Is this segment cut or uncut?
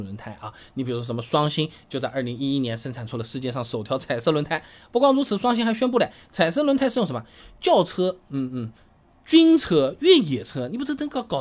uncut